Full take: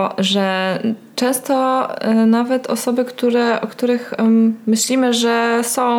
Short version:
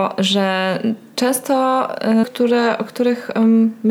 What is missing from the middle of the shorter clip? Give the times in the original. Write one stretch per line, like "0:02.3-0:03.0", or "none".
0:02.2-0:03.1